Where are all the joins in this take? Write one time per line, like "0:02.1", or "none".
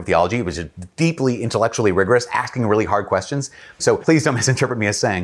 0:03.8